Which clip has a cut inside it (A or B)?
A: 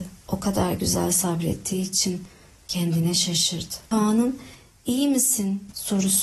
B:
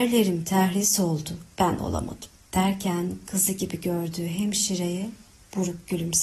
B